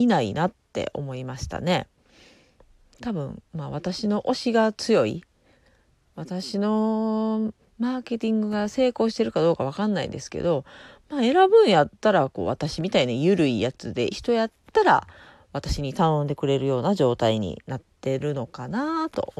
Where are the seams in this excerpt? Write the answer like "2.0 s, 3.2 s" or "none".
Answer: 14.1 s